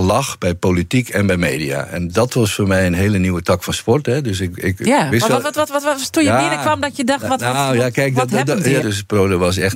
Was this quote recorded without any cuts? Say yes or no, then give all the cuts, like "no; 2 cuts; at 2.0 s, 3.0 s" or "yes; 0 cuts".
no; 1 cut; at 8.8 s